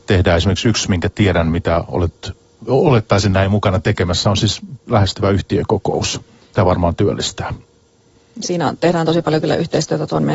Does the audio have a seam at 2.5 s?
no; 1 cut; at 8.4 s

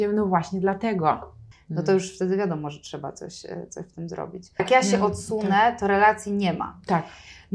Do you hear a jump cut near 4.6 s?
yes; 2 cuts; at 1.5 s, 4.6 s

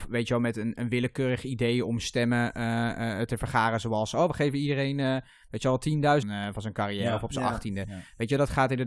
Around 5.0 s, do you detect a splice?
no; 1 cut; at 6.2 s

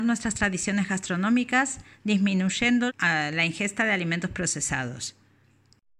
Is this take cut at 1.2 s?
no; 1 cut; at 2.9 s

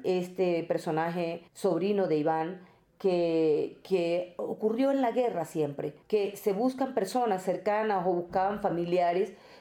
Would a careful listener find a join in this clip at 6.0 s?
yes; 2 cuts; at 1.5 s, 6.0 s

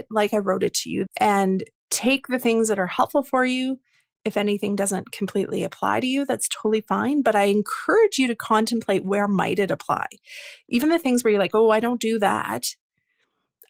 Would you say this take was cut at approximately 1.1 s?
yes; 1 cut; at 1.1 s

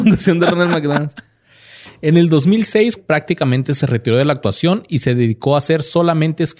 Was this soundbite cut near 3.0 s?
yes; 1 cut; at 3.0 s

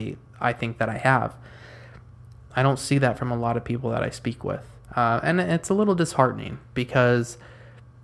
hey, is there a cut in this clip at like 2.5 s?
yes; 1 cut; at 2.5 s

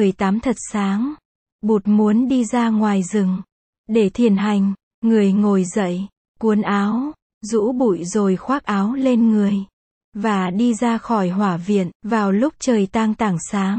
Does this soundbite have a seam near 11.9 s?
yes; 1 cut; at 11.9 s

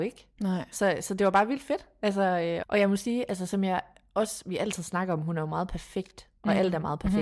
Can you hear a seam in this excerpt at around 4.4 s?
no; 1 cut; at 2.6 s

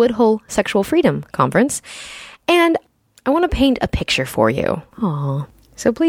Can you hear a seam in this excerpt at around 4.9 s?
yes; 1 cut; at 4.9 s

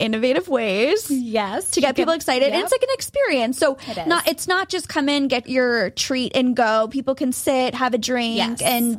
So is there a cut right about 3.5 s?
no; 1 cut; at 5.4 s

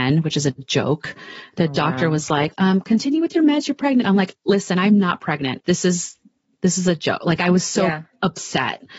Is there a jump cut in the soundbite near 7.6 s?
no; 2 cuts; at 2.5 s, 5.6 s

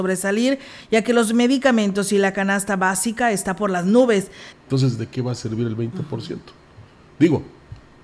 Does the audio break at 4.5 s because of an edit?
yes; 1 cut; at 4.5 s

